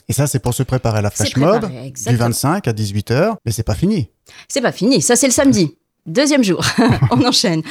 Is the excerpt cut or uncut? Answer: cut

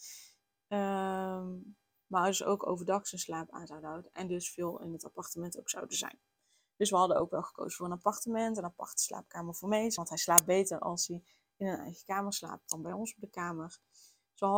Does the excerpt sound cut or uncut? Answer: uncut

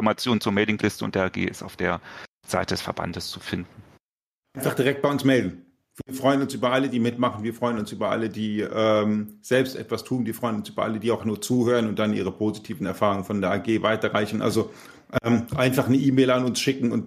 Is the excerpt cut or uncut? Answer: cut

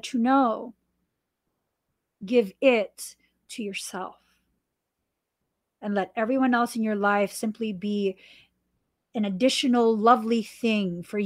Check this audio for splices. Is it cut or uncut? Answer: uncut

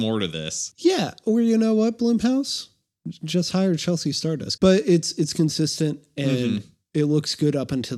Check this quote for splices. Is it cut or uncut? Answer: cut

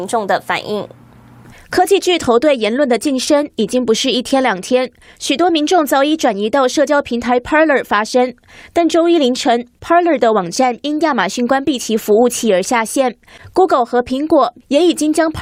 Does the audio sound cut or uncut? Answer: uncut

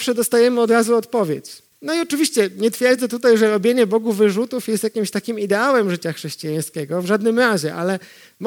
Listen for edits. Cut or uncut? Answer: cut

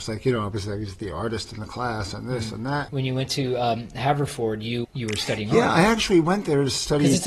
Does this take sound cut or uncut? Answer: cut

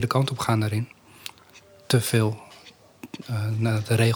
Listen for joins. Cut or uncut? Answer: uncut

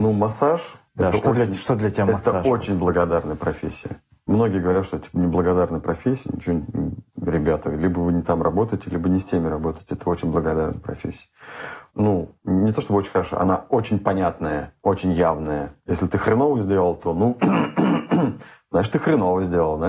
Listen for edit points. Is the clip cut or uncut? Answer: cut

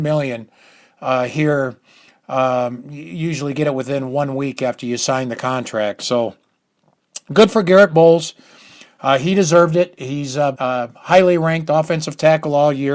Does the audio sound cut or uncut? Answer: cut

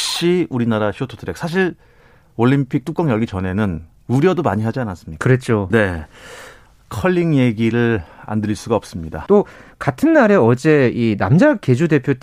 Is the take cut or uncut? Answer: cut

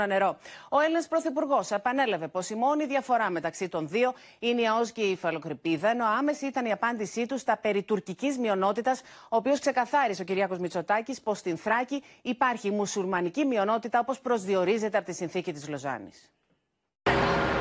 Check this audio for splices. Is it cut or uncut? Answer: uncut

